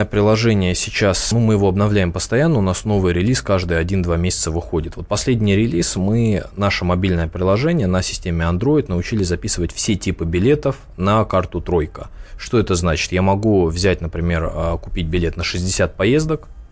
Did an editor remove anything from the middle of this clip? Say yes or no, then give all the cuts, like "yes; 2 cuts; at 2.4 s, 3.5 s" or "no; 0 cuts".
yes; 1 cut; at 1.3 s